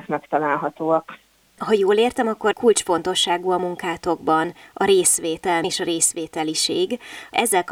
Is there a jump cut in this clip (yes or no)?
yes